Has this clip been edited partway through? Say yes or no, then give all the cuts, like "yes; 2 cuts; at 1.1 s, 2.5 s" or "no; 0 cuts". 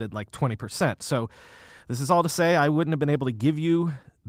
no; 0 cuts